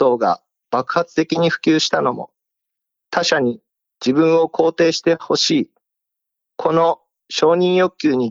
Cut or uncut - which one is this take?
uncut